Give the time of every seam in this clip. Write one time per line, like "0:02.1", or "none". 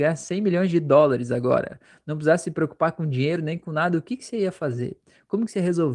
none